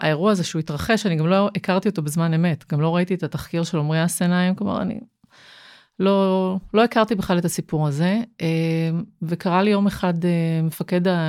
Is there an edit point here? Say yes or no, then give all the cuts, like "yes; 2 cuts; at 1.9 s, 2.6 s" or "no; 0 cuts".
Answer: no; 0 cuts